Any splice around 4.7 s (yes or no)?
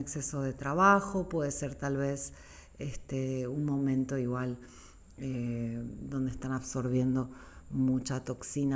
no